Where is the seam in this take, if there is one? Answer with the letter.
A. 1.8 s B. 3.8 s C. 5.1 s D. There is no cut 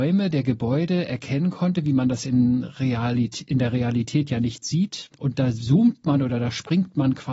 C